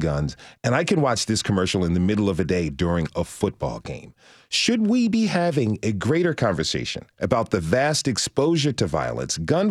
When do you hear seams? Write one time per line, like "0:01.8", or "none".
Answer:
none